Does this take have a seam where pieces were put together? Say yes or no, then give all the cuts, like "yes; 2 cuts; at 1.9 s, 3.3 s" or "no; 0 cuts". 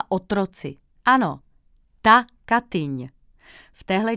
yes; 1 cut; at 0.9 s